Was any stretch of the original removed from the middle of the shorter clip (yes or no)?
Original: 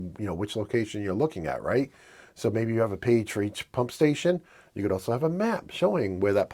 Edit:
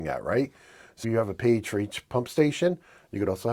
yes